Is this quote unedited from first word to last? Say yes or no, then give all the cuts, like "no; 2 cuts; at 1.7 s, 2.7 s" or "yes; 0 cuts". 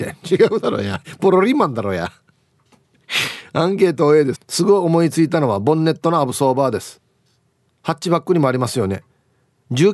no; 1 cut; at 4.3 s